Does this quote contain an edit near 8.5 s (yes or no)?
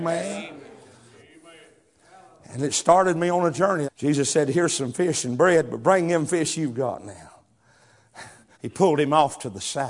yes